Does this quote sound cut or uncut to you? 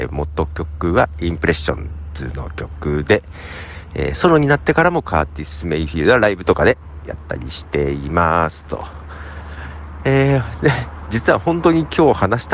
uncut